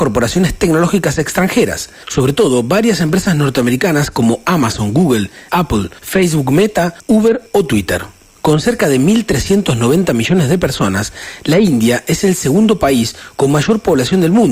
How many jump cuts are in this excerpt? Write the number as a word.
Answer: two